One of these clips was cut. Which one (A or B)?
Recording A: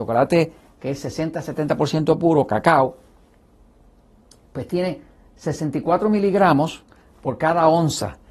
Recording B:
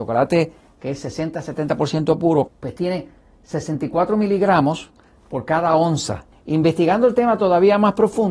B